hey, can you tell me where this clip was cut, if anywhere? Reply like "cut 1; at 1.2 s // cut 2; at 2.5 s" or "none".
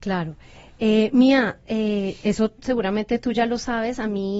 none

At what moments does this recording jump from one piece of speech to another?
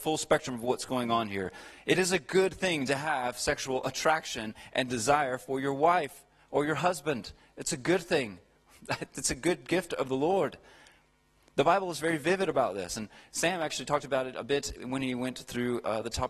none

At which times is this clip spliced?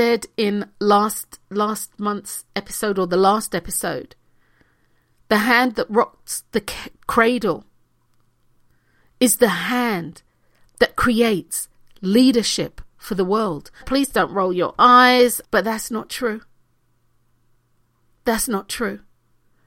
cut 1; at 13.8 s // cut 2; at 15.4 s

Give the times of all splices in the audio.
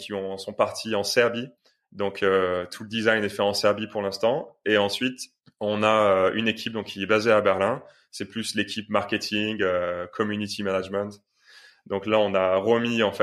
none

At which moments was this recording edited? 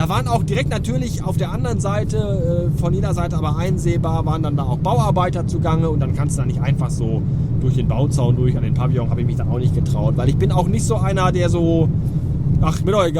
none

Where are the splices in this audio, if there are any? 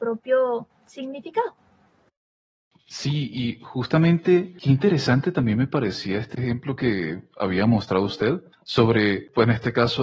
none

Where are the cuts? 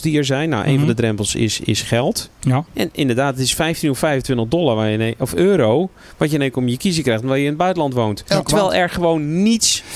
cut 1; at 2.7 s

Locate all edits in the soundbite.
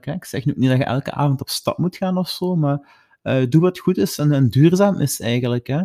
none

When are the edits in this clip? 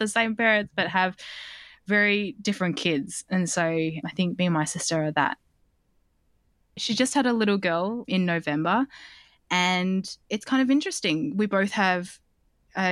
cut 1; at 4.0 s

